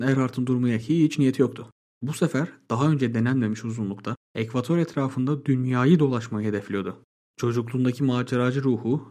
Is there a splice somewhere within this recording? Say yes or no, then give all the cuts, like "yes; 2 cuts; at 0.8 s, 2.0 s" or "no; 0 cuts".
no; 0 cuts